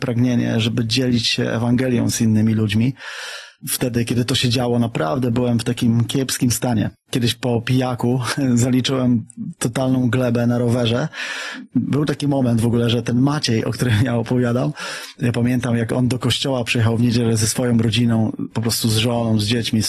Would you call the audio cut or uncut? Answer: uncut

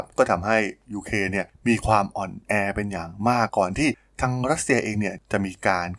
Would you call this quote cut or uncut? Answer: cut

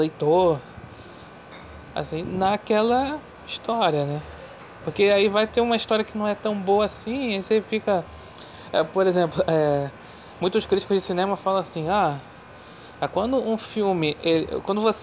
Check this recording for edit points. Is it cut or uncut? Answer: uncut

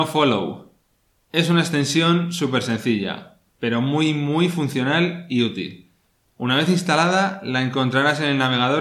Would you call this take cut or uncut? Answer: uncut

